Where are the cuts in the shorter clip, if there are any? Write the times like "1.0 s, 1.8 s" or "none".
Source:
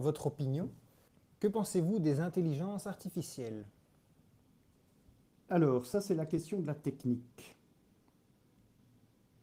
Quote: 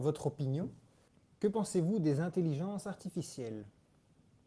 none